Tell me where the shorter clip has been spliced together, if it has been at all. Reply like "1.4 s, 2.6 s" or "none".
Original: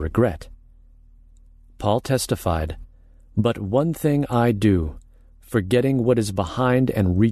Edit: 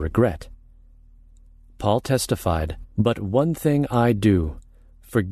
2.9 s